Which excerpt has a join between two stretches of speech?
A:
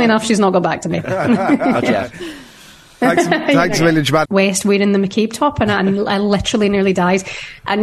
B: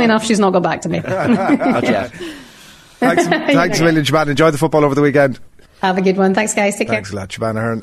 A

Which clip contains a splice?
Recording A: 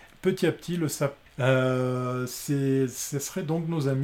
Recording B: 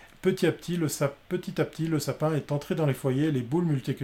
A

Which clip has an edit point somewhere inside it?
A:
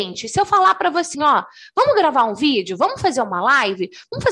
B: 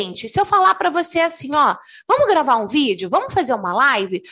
A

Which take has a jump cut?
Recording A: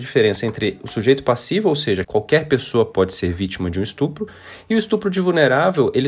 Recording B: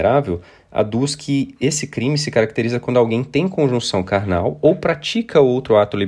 A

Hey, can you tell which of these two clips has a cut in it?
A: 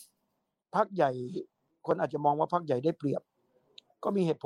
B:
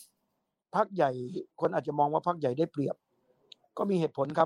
B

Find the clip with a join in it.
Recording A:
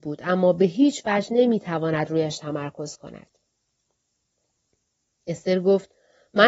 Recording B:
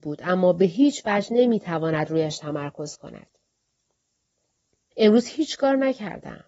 B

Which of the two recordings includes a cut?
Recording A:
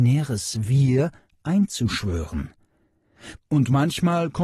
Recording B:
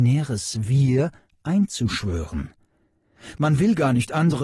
A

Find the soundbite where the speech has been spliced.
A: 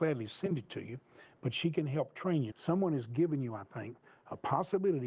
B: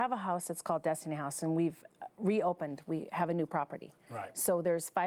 A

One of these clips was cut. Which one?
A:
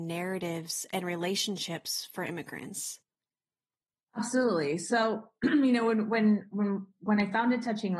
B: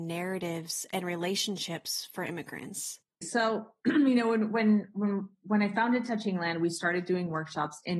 B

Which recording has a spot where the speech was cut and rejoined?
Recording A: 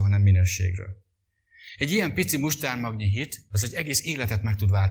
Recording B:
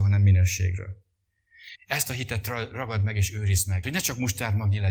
B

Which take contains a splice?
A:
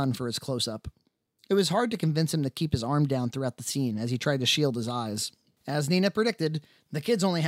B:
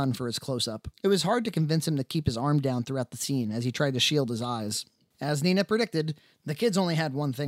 B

